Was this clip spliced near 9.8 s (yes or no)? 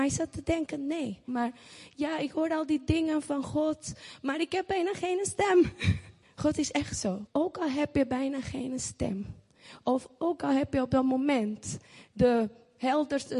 no